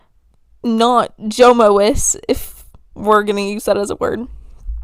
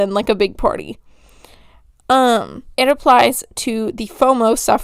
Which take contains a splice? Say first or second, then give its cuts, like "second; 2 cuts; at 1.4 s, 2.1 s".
second; 1 cut; at 2.7 s